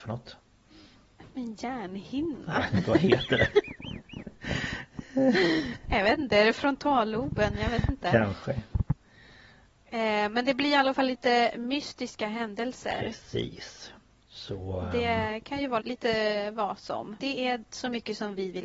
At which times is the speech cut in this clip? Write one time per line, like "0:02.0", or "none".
0:15.8
0:17.2

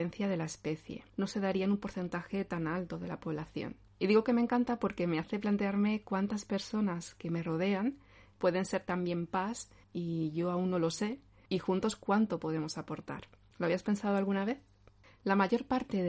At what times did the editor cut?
0:01.1

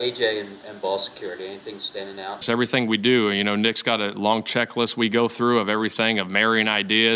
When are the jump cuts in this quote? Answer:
0:02.4

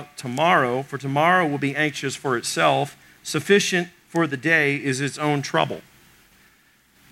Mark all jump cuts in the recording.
none

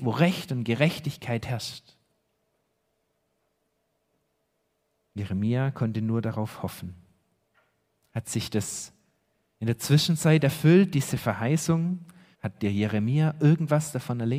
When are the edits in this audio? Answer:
0:12.3

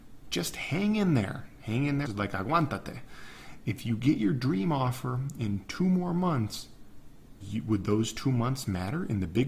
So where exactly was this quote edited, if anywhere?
0:02.0
0:07.4

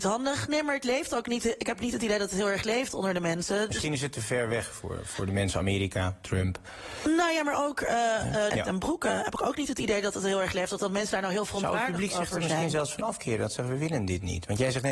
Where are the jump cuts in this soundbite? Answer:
0:08.5

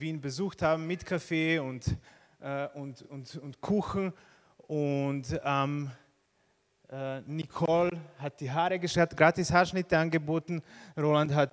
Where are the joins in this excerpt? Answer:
none

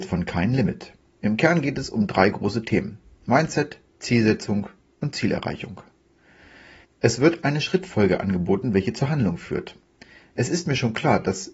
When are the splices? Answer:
0:01.2
0:06.8

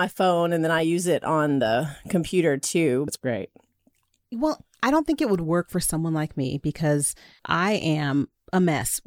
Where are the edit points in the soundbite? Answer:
0:03.1
0:07.4

